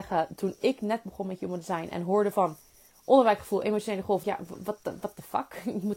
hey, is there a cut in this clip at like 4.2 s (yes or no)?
yes